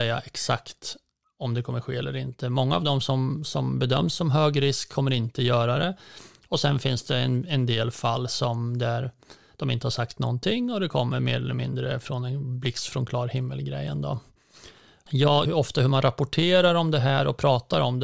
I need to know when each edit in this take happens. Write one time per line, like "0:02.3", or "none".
0:15.4